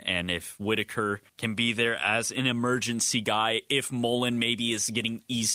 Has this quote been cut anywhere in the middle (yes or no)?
yes